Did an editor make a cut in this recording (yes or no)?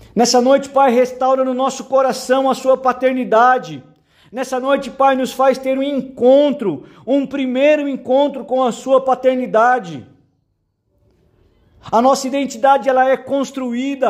yes